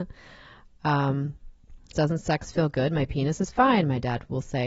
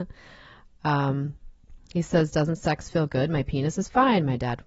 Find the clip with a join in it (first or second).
first